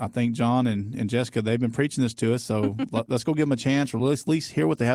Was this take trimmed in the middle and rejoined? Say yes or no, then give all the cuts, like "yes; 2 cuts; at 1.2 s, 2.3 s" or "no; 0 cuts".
yes; 1 cut; at 3.1 s